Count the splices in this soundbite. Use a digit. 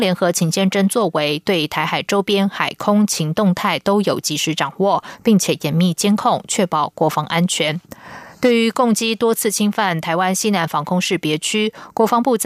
0